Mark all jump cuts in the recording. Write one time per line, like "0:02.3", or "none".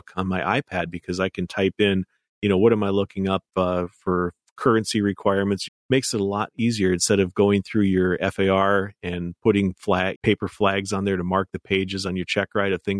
0:05.7
0:10.1